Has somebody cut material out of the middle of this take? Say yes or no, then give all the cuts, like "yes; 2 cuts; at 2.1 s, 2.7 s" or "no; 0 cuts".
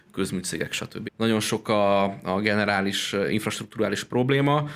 yes; 1 cut; at 1.0 s